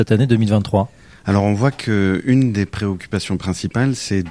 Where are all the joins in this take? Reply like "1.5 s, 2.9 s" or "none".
none